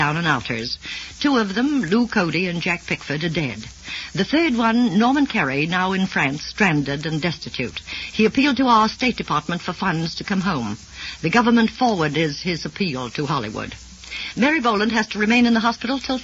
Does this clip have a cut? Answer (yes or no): no